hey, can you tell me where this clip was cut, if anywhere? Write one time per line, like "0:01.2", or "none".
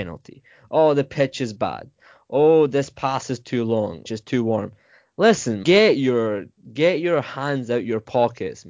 0:04.1
0:05.6